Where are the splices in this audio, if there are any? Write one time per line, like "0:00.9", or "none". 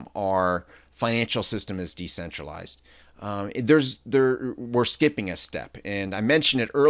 none